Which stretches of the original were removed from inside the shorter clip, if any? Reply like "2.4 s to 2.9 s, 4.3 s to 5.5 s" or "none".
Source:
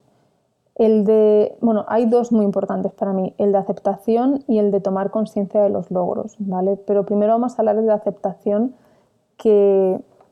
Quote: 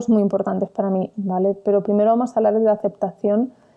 3.4 s to 6.4 s